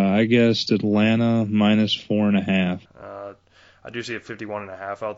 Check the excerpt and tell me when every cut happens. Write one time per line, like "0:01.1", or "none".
0:02.9